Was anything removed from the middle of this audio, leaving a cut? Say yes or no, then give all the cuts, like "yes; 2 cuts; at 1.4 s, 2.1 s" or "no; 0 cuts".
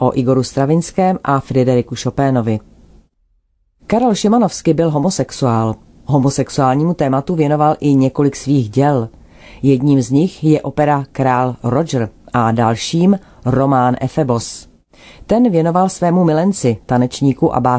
no; 0 cuts